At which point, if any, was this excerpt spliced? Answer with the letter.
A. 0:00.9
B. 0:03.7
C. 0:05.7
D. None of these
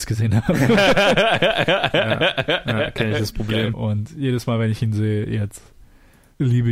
B